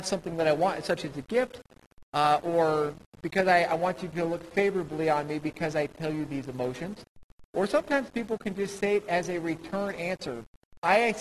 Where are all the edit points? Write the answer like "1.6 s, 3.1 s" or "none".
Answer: none